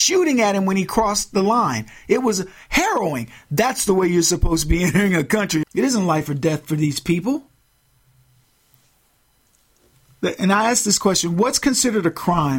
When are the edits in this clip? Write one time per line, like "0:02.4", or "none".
0:05.6